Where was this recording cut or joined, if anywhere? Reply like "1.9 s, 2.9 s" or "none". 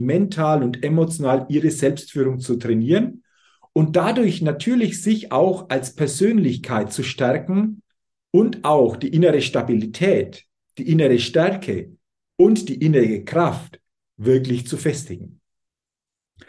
none

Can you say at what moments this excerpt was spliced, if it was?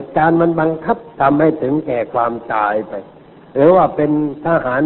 1.1 s

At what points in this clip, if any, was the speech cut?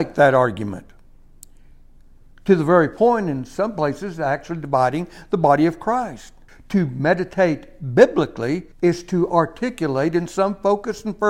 6.5 s, 8.7 s

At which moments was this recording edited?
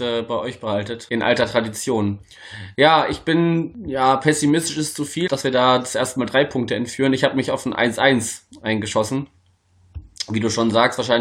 5.3 s

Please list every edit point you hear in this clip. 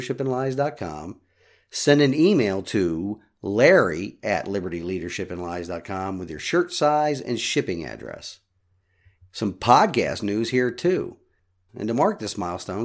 9.2 s, 11.7 s

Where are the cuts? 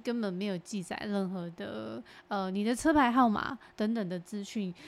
none

